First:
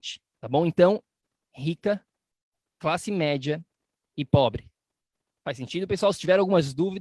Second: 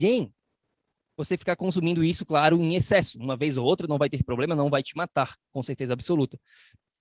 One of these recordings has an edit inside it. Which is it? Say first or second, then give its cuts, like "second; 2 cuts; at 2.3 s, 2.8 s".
first; 1 cut; at 1.4 s